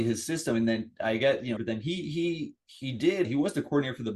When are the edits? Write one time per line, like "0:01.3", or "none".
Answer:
0:01.6
0:03.2